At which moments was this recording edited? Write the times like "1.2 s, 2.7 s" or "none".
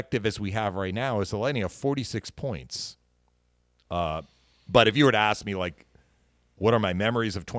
3.8 s